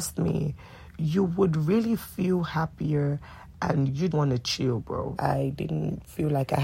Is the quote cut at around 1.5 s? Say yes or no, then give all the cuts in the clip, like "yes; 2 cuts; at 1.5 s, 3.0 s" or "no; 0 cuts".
no; 2 cuts; at 4.1 s, 5.2 s